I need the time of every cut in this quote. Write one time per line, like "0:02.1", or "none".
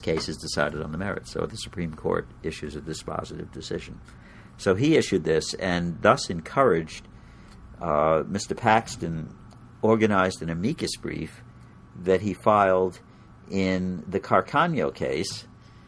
none